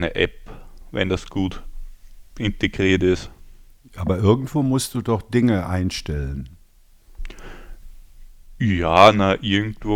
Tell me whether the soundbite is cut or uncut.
uncut